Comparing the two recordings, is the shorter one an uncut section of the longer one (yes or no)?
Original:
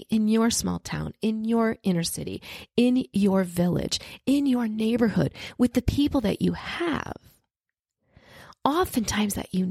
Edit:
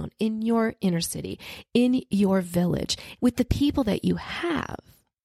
no